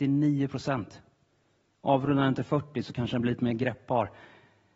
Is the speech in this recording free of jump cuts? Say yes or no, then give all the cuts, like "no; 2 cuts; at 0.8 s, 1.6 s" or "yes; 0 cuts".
yes; 0 cuts